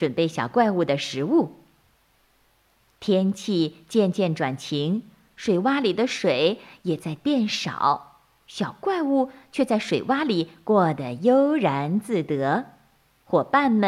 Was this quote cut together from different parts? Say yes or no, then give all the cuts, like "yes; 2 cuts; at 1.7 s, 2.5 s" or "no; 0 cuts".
no; 0 cuts